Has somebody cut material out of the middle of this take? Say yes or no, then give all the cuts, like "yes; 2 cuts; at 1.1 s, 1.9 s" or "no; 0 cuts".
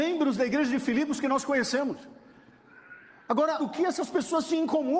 yes; 1 cut; at 3.6 s